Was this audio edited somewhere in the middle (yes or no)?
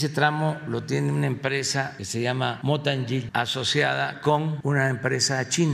no